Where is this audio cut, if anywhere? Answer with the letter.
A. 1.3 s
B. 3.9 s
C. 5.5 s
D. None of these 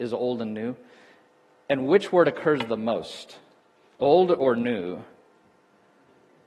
D